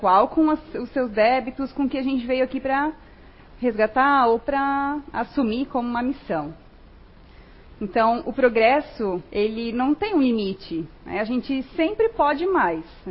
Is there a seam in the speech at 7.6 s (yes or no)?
yes